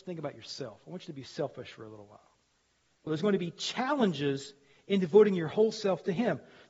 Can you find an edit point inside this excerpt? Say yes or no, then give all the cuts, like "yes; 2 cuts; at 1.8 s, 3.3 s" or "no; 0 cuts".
yes; 1 cut; at 3.1 s